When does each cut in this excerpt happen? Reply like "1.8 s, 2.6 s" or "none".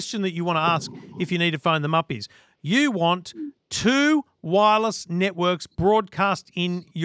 none